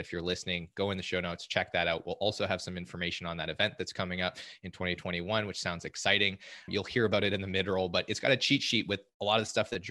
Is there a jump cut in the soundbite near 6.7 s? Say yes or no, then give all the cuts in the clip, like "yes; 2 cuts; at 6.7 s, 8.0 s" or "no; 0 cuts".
yes; 1 cut; at 6.7 s